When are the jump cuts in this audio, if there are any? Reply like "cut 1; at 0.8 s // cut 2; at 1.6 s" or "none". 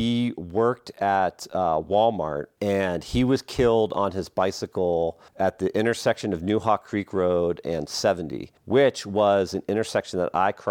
cut 1; at 5.3 s // cut 2; at 8.6 s